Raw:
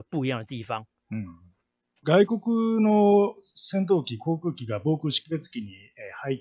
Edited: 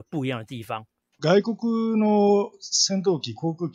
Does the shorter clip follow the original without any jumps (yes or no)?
no